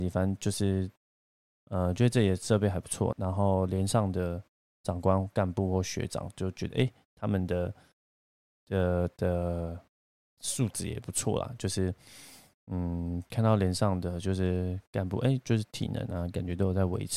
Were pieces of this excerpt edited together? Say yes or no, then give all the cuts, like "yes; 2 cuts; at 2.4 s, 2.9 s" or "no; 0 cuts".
yes; 1 cut; at 3.1 s